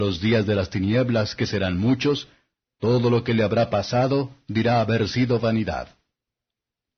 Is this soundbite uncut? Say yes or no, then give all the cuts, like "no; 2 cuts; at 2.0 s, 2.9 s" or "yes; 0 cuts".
yes; 0 cuts